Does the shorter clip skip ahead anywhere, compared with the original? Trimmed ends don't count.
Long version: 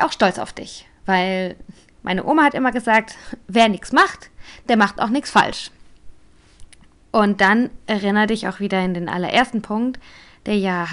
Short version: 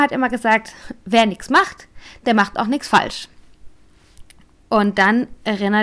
no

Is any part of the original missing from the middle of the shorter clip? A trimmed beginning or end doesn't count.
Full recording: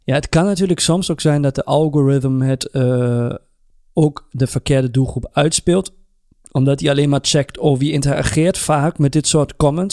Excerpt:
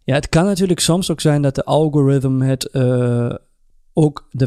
no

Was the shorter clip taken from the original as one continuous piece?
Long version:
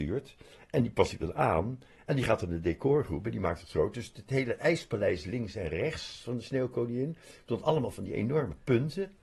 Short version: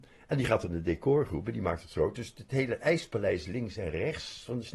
yes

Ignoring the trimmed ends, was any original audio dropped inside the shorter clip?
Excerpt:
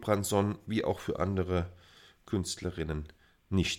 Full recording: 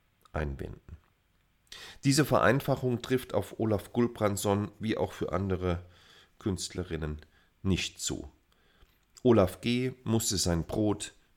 no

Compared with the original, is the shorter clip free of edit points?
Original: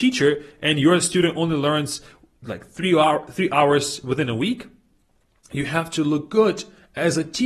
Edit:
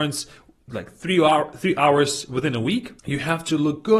no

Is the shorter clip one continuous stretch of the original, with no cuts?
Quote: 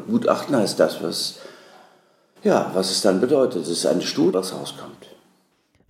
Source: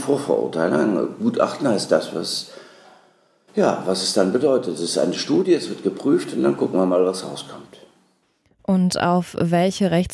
no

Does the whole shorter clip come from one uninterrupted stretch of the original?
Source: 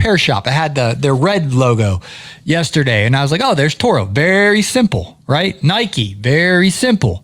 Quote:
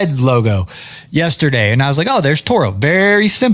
yes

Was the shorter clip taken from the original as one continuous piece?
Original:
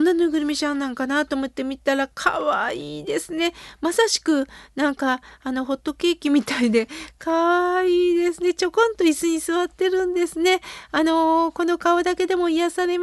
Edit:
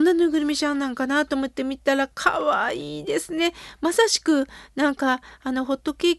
yes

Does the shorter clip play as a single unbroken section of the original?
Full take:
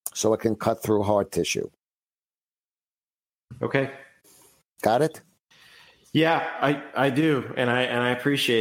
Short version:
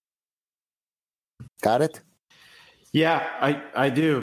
no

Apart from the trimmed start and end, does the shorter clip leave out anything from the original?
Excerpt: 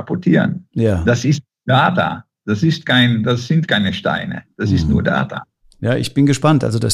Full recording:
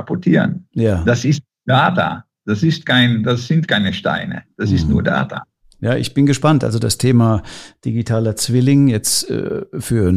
no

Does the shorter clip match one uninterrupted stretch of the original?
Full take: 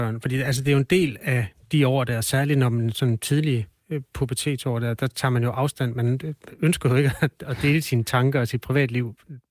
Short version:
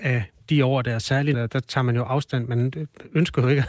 no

